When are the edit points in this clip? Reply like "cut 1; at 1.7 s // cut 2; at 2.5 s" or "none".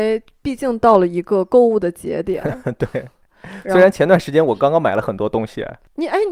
none